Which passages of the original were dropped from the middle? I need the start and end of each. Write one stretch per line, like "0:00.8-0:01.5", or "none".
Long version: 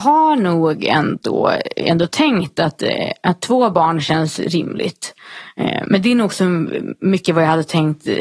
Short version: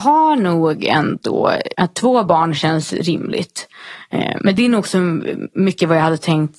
0:01.7-0:03.2